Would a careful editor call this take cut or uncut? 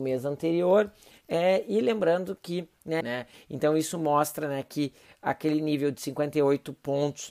cut